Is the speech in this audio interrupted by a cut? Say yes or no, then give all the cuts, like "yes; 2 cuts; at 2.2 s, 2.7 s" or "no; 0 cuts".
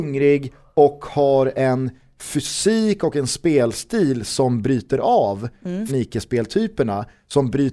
yes; 1 cut; at 5.9 s